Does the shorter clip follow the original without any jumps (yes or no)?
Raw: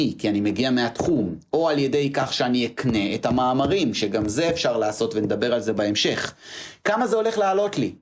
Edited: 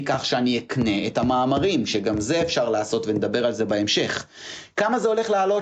yes